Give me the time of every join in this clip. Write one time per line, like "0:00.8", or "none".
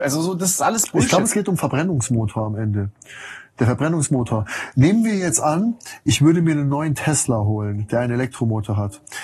none

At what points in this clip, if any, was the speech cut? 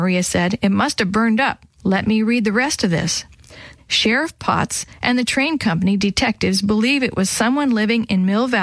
0:01.8
0:03.8

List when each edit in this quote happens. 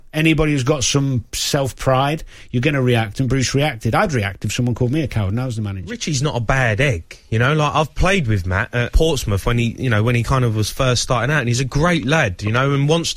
none

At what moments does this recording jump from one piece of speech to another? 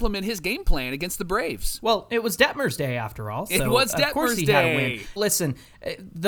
0:05.2

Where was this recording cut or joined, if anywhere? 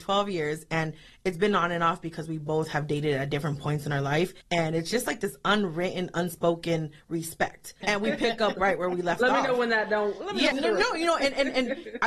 0:04.4
0:07.8
0:10.5

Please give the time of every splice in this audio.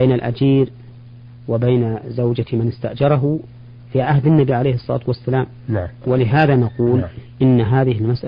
0:06.0

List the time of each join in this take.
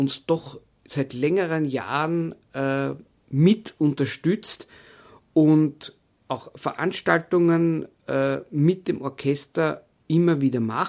none

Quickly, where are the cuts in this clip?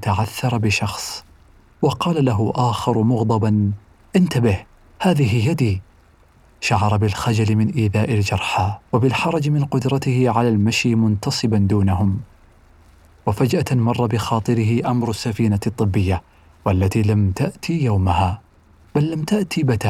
0:08.9

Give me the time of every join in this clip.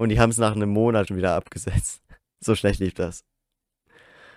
0:01.1

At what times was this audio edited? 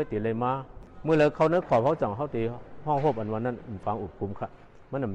0:03.8

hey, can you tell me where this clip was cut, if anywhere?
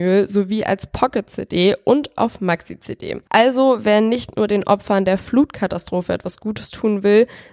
none

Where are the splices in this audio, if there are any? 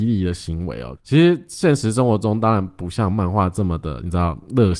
0:01.0

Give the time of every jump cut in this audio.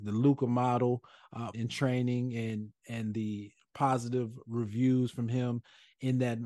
0:01.5

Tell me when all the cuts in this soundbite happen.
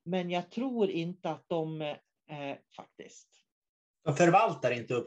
0:02.6

